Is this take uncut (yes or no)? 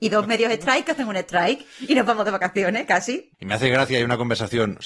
no